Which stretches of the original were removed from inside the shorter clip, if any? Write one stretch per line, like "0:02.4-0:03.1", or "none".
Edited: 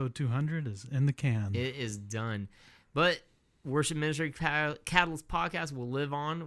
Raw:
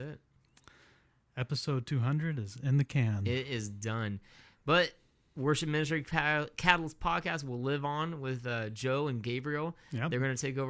none